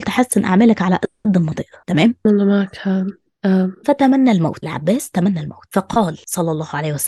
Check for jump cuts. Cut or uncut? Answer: cut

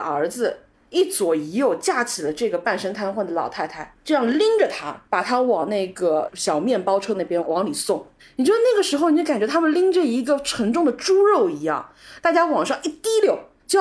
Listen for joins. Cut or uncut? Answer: uncut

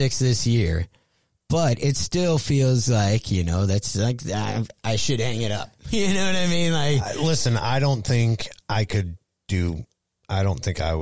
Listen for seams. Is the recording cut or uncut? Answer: uncut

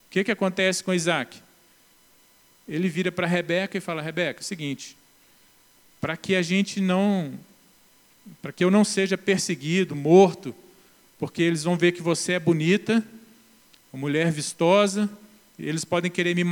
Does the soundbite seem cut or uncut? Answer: uncut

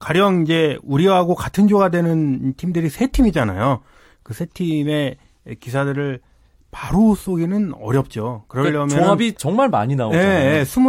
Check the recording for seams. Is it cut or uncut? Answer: uncut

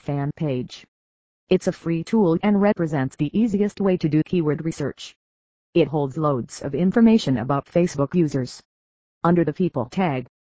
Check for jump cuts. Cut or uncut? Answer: uncut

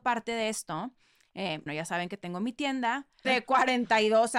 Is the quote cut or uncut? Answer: cut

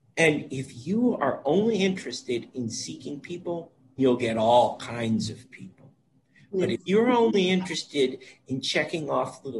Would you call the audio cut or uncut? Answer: cut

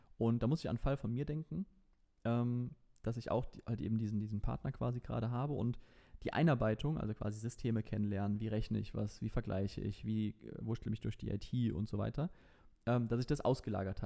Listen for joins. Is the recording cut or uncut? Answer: uncut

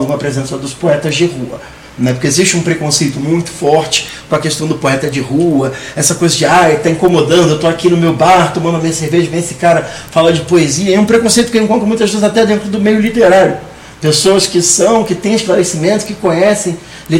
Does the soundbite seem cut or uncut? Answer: uncut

